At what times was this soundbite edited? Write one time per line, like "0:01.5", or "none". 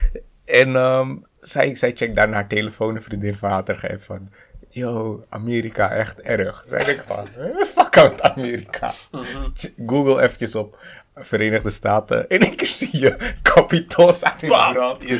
none